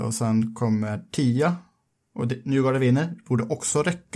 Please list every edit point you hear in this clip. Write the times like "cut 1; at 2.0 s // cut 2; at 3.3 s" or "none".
none